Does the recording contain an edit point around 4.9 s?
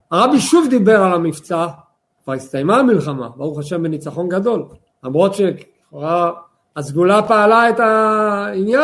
yes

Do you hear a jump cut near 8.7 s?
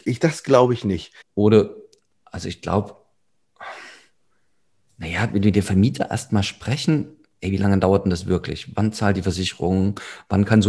no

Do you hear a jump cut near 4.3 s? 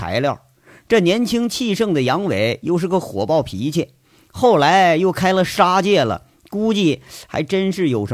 no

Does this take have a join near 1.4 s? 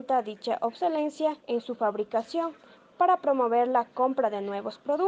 yes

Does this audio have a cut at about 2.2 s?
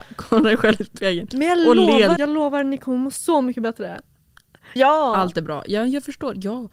yes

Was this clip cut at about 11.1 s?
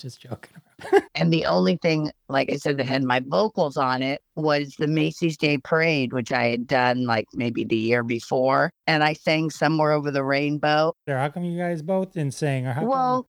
yes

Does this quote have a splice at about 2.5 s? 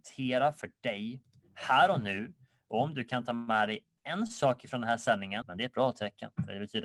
no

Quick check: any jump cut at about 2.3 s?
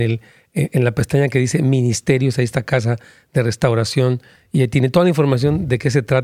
no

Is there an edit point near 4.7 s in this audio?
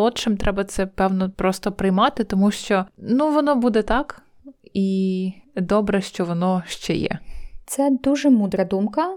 no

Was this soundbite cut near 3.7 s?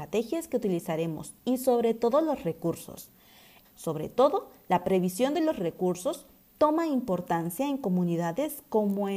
yes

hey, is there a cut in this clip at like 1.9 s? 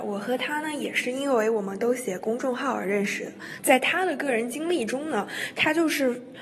no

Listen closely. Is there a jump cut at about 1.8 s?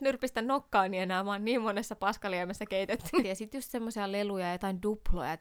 no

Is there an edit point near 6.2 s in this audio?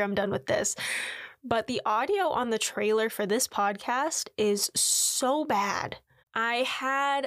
yes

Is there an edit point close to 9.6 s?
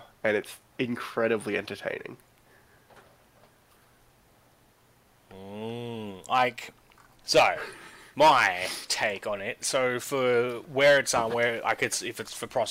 no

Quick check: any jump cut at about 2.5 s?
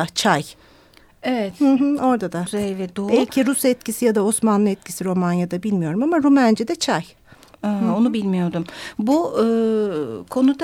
yes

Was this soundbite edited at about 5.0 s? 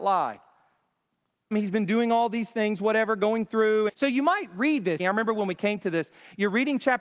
yes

